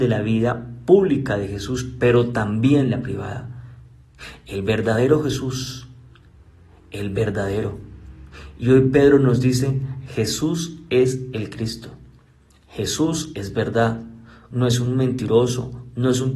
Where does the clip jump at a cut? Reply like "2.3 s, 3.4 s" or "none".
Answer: 14.5 s

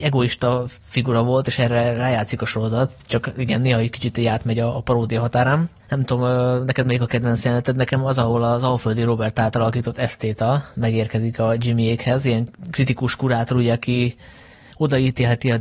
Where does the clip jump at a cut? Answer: 5.8 s

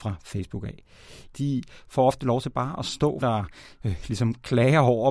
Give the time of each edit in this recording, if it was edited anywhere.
1.3 s, 3.2 s

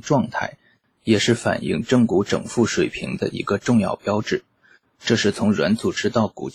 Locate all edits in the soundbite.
none

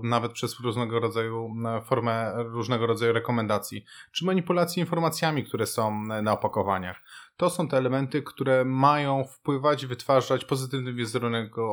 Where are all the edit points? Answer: none

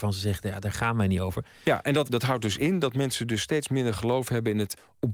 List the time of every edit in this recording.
2.0 s

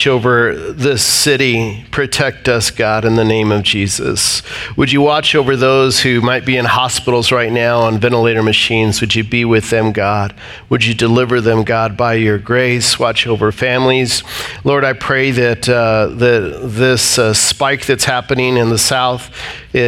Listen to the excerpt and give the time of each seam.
none

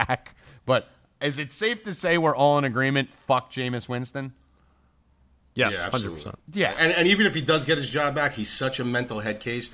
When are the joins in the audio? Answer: 7.2 s

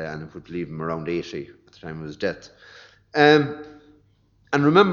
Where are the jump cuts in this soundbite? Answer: none

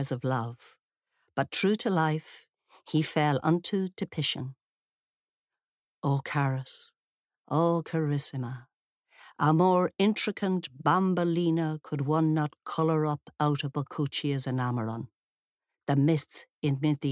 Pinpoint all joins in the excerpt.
none

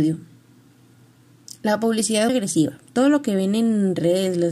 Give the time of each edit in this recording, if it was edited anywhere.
2.3 s

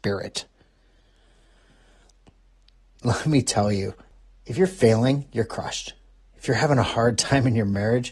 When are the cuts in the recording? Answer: none

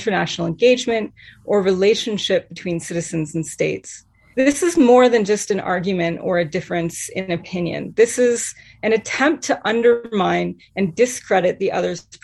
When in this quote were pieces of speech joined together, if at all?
4.3 s

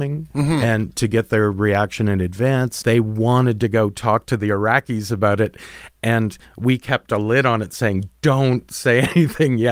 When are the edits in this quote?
2.8 s

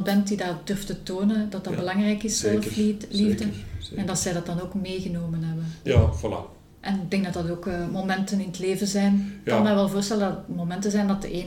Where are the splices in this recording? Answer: 5.9 s

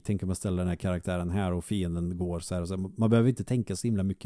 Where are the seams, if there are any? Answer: none

